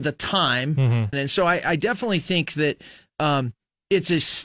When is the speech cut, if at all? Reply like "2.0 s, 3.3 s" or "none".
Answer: 1.1 s